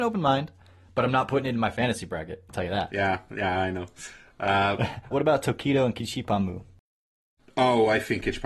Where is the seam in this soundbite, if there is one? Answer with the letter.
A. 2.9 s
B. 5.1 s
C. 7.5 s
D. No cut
B